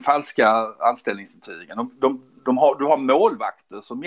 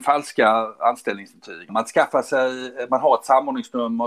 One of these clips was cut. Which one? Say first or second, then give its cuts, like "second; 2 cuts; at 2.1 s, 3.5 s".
second; 1 cut; at 1.7 s